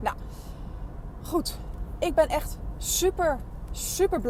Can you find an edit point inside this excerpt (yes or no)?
no